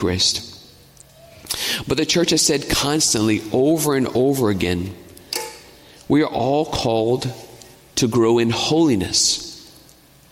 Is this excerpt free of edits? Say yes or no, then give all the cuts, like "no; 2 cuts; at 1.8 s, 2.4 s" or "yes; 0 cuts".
yes; 0 cuts